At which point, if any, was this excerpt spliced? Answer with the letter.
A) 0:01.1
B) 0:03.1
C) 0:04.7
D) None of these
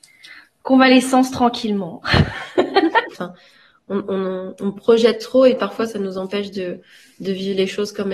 B